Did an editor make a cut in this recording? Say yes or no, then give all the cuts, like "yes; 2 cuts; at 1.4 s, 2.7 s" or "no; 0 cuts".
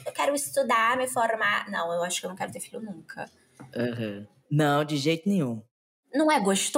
yes; 1 cut; at 4.5 s